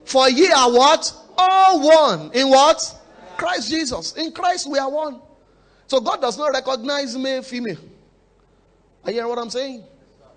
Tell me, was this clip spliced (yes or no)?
no